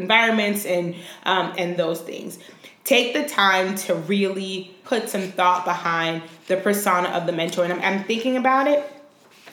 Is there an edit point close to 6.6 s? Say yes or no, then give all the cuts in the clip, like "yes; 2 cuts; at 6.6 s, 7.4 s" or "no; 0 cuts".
no; 3 cuts; at 1.5 s, 4.8 s, 7.8 s